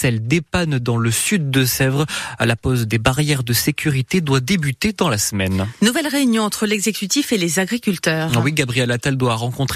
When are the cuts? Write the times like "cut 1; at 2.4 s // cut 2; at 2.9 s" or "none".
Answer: none

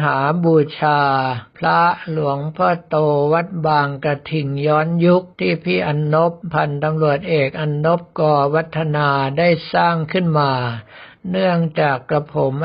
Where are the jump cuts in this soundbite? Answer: cut 1; at 5.3 s

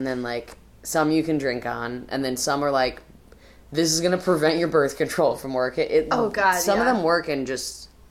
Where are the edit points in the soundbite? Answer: none

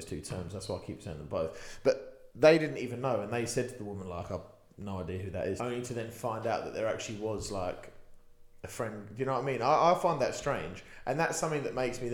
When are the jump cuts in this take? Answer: cut 1; at 5.6 s

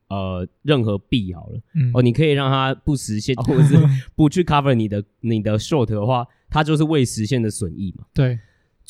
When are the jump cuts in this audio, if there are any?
cut 1; at 3.4 s

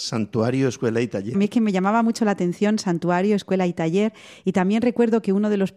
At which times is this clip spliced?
cut 1; at 1.3 s

